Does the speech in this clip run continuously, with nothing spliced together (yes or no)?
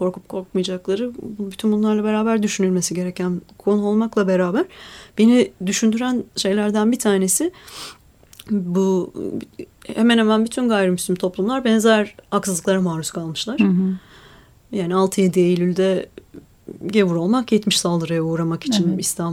yes